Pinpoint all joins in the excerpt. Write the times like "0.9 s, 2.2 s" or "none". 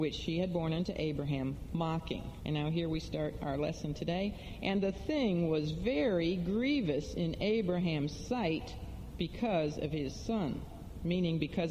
2.4 s